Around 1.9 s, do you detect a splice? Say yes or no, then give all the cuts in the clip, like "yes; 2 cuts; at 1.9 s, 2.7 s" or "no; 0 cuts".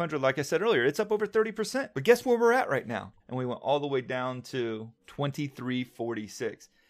no; 1 cut; at 3.2 s